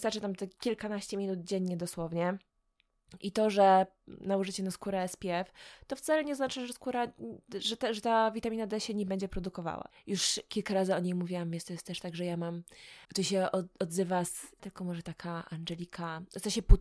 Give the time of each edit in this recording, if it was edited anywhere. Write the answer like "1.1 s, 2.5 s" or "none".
9.9 s, 13.0 s, 14.6 s